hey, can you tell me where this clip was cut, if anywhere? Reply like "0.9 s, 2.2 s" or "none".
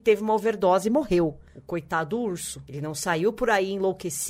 none